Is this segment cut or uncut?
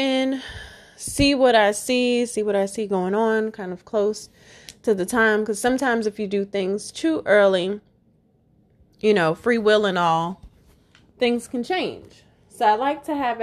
uncut